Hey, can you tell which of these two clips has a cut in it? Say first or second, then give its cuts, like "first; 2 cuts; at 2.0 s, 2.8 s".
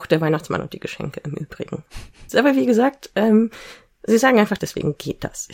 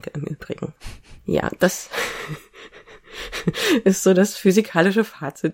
first; 2 cuts; at 2.3 s, 4.6 s